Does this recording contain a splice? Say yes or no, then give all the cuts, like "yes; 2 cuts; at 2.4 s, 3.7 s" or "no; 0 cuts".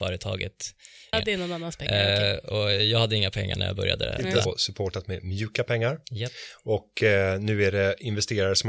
yes; 2 cuts; at 1.1 s, 4.5 s